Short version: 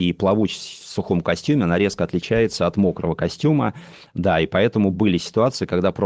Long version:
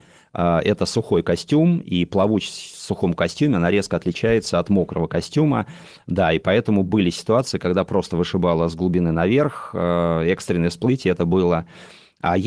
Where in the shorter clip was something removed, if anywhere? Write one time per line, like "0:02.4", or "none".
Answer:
none